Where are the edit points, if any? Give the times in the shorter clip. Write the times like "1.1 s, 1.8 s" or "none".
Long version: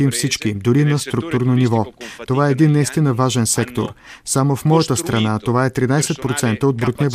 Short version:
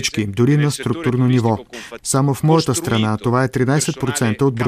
2.0 s